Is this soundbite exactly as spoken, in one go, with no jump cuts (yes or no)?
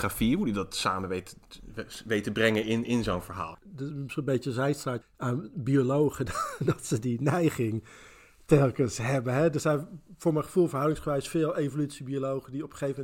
no